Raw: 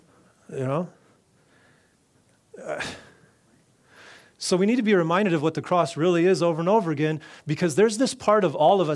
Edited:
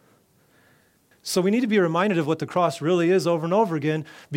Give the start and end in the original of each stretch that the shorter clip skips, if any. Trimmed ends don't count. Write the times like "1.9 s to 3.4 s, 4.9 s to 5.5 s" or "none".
2.1 s to 4.3 s